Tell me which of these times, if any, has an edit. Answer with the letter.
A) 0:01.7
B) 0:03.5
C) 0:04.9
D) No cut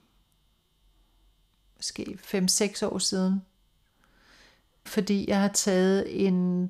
C